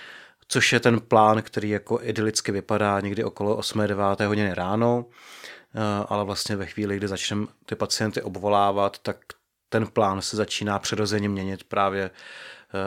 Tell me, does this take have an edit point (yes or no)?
no